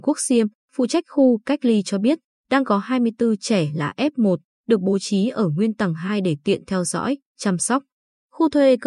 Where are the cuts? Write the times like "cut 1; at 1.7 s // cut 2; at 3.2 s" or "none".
none